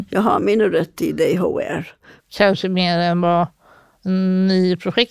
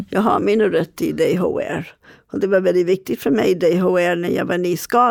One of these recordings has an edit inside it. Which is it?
first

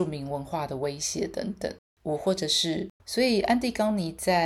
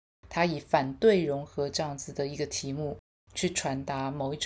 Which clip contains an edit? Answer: first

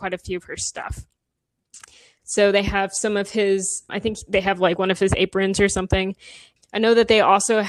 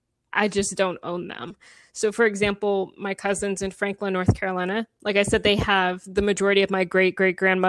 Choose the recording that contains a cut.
first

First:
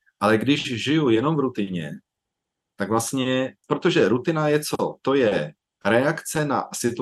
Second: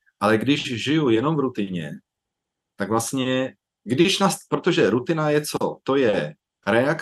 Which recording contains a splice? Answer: first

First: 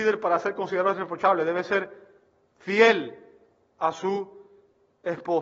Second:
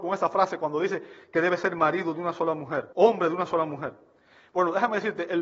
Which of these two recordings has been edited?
second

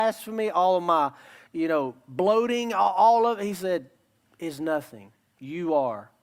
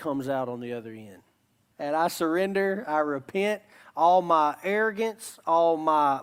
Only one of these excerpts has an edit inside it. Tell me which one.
second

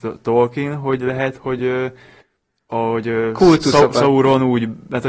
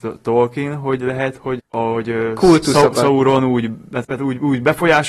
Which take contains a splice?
second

